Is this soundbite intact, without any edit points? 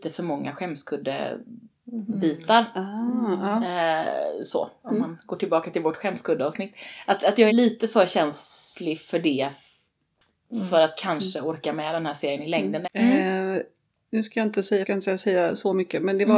no; 3 cuts; at 7.5 s, 12.8 s, 14.8 s

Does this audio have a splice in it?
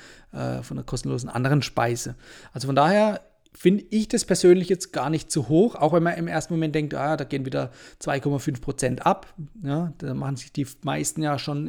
no; 0 cuts

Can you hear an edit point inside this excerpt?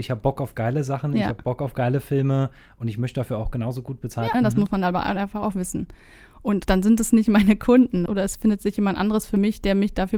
yes; 3 cuts; at 4.3 s, 6.6 s, 8.1 s

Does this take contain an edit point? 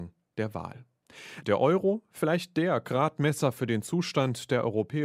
no; 0 cuts

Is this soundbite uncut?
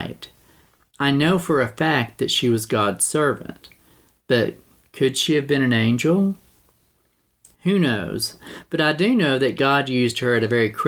yes; 0 cuts

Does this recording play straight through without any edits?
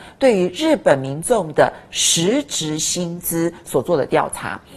yes; 0 cuts

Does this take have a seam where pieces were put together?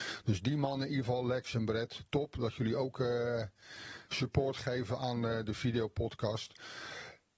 no; 0 cuts

